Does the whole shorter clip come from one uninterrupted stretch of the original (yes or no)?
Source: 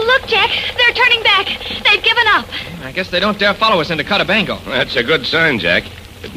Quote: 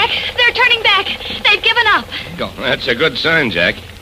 no